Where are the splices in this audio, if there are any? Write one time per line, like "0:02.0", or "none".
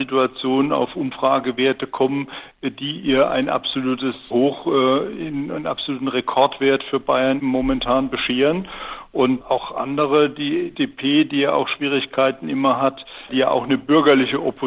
0:07.4
0:13.3